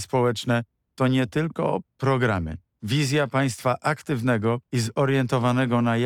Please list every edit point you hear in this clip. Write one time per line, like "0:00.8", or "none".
0:02.7
0:04.7